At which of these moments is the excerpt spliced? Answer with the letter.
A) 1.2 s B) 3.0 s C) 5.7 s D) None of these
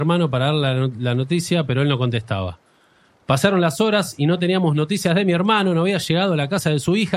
D